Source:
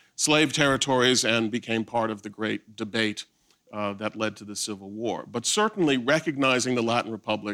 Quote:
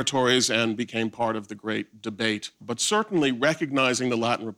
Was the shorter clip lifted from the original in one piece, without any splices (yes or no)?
no